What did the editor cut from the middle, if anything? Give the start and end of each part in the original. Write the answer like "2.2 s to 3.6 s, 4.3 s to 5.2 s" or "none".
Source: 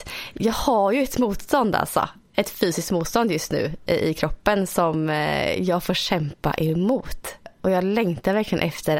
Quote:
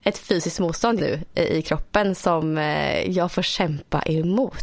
3.3 s to 3.5 s